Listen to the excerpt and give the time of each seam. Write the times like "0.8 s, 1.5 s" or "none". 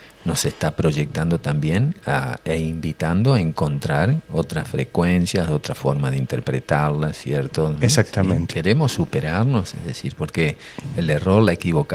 7.8 s